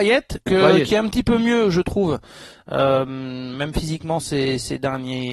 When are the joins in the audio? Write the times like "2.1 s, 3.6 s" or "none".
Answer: none